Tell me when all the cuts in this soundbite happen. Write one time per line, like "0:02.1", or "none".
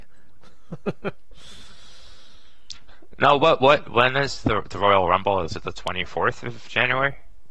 none